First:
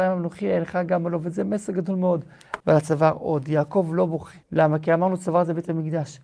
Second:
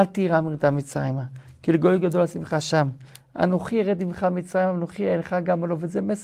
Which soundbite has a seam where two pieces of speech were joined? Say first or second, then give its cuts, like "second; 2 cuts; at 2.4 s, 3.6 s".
first; 2 cuts; at 2.6 s, 4.4 s